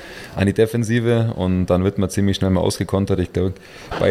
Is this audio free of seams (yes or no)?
yes